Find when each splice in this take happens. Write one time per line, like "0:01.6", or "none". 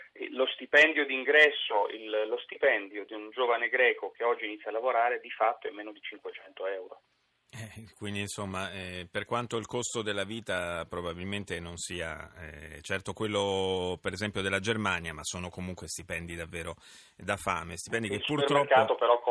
none